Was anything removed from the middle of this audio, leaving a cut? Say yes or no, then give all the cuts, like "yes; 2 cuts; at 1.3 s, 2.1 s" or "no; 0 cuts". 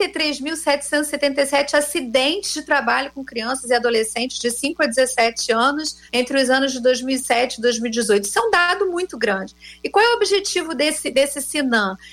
yes; 1 cut; at 6.1 s